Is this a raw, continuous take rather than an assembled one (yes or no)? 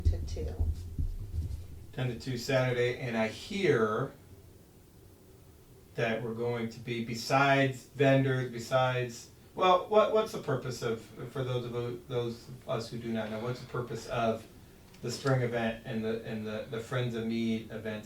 yes